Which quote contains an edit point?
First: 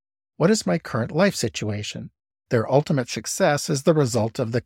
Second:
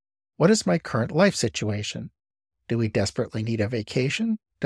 first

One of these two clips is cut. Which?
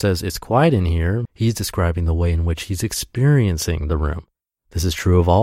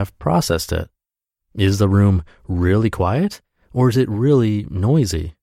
first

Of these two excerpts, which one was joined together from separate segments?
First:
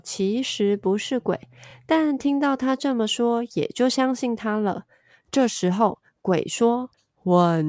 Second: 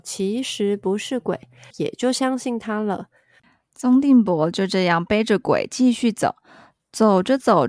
second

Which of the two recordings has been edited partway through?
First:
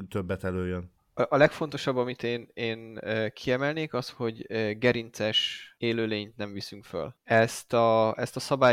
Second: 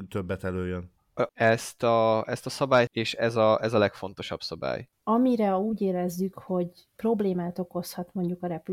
second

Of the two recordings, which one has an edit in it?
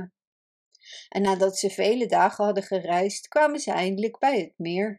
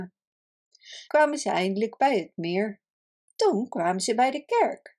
second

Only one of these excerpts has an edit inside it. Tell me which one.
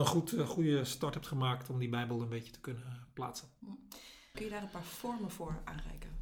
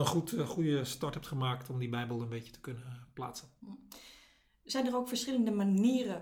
first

